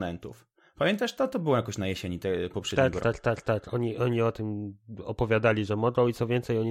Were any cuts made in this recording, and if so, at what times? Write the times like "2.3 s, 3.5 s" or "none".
3.0 s